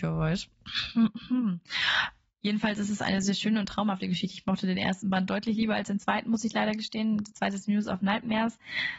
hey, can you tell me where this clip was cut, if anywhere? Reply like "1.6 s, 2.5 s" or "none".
3.2 s